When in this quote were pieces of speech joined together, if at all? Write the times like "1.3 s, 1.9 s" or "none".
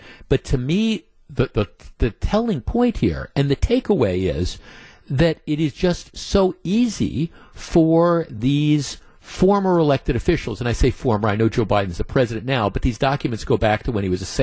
none